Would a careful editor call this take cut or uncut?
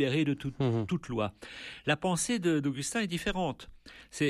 uncut